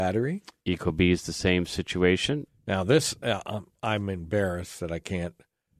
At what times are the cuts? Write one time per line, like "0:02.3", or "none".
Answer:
0:02.5